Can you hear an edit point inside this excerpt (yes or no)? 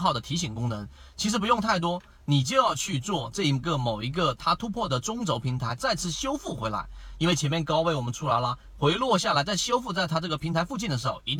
no